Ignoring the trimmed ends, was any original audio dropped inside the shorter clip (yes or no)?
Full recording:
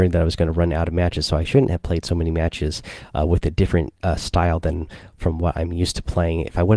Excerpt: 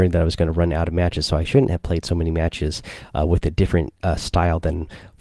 no